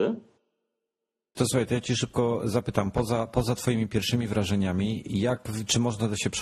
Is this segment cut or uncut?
cut